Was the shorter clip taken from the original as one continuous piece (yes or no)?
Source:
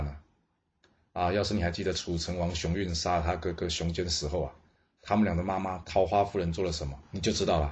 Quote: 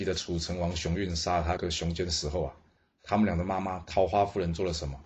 no